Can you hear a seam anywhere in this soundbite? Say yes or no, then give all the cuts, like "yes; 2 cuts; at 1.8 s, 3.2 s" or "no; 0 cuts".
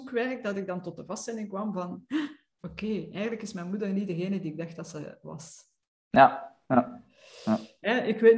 no; 0 cuts